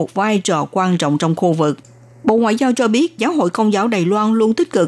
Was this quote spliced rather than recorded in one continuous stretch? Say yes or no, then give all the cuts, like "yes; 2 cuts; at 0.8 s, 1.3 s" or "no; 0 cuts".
yes; 1 cut; at 3.2 s